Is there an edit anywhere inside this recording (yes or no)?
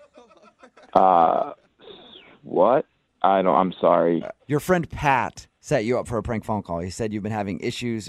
yes